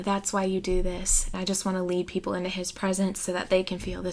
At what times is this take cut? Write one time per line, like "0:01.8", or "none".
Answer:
0:01.3